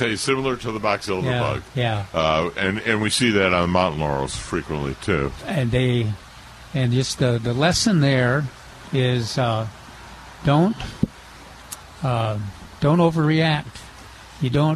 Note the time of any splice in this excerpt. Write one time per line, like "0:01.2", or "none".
0:05.4